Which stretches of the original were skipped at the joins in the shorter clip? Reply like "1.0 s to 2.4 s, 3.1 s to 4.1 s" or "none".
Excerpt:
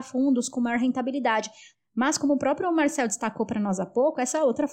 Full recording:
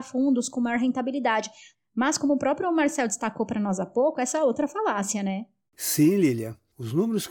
none